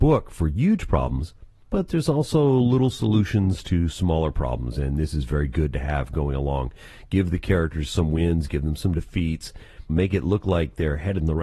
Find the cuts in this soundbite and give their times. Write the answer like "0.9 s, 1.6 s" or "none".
9.9 s